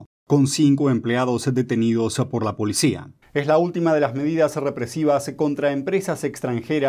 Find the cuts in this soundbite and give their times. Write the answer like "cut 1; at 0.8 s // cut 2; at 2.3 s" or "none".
cut 1; at 3.2 s